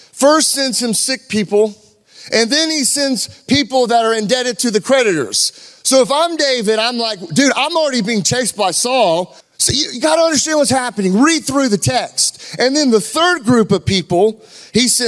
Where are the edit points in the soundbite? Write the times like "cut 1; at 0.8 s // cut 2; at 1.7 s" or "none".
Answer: cut 1; at 9.4 s

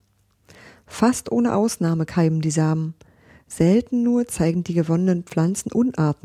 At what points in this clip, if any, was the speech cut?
none

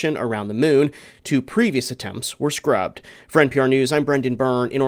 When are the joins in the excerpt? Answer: none

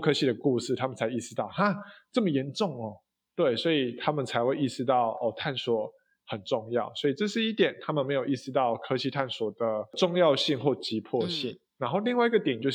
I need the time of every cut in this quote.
none

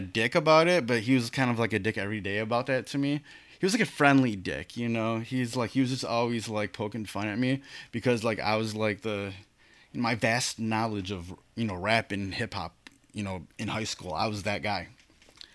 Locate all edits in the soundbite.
none

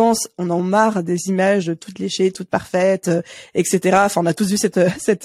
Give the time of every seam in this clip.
none

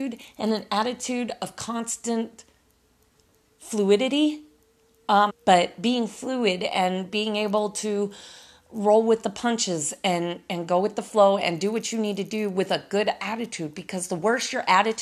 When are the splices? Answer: cut 1; at 5.3 s

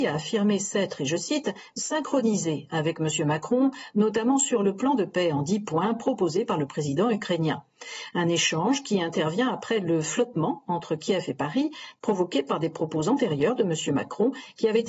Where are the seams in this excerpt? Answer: none

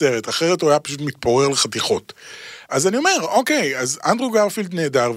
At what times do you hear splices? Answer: none

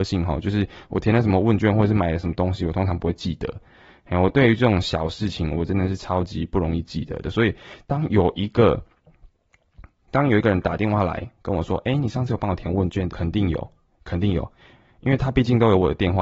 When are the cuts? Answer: cut 1; at 13.1 s

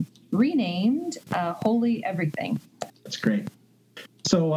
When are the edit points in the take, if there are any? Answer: cut 1; at 2.9 s

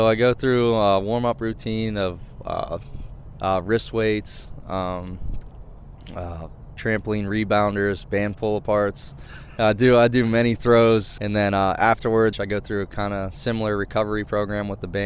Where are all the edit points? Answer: cut 1; at 3.4 s // cut 2; at 11.2 s // cut 3; at 12.3 s

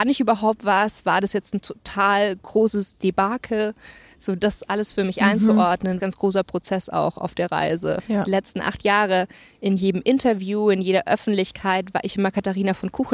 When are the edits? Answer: cut 1; at 6.0 s // cut 2; at 8.0 s

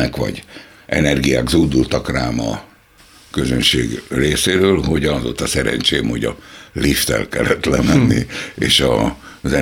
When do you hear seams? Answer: none

